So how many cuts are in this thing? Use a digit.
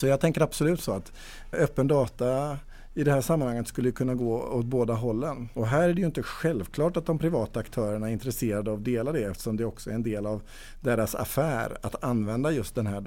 2